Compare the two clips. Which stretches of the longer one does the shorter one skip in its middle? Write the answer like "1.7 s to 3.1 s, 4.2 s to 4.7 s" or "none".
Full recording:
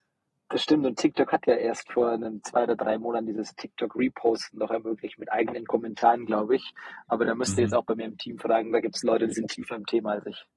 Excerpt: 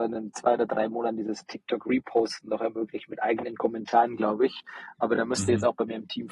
none